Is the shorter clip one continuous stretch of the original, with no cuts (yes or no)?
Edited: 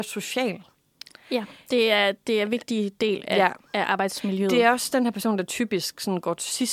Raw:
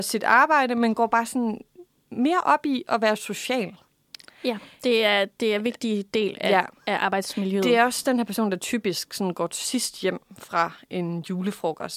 yes